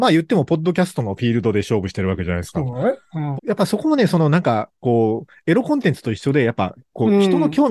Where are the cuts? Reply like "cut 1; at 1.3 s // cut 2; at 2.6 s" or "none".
cut 1; at 3.4 s